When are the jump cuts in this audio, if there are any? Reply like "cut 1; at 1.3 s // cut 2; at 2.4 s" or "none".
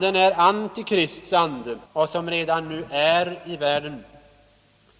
cut 1; at 1.9 s